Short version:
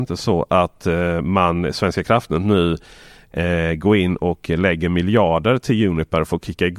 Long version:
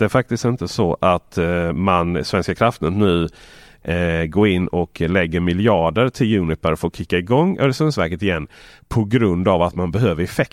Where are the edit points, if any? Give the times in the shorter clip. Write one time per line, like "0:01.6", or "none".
none